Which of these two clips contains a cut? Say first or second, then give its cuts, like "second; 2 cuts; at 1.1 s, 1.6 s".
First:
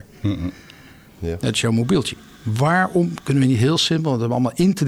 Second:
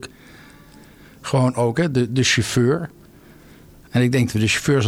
first; 2 cuts; at 1.1 s, 2.3 s